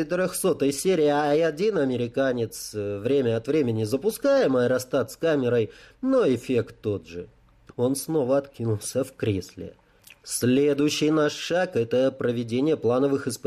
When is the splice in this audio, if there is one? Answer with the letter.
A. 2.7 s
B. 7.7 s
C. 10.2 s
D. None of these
B